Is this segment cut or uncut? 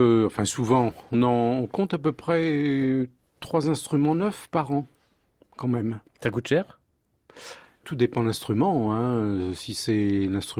cut